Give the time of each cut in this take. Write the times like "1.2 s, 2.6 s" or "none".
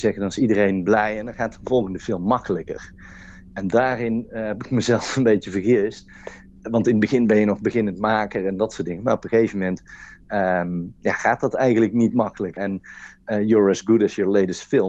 12.6 s